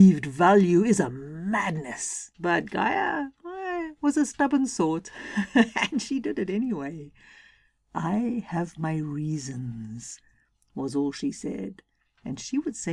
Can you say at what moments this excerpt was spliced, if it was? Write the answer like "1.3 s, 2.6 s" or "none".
2.3 s